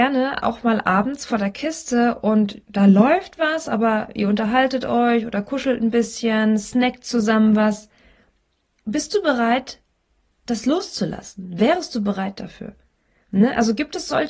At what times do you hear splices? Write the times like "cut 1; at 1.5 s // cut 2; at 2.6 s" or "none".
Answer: none